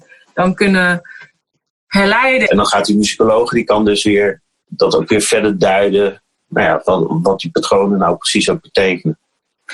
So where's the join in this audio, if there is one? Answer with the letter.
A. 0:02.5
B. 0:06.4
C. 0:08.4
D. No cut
A